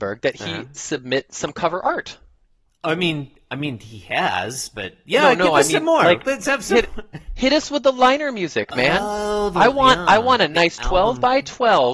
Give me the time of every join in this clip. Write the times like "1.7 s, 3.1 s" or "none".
none